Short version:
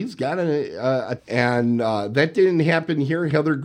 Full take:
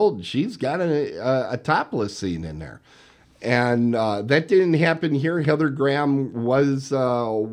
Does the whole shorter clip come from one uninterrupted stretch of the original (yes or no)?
no